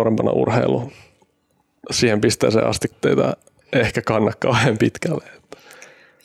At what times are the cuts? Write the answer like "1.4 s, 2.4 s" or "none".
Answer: 2.9 s